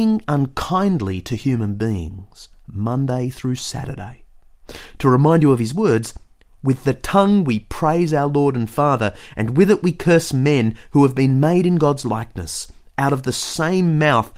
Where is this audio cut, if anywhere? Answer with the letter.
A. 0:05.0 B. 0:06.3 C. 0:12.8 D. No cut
D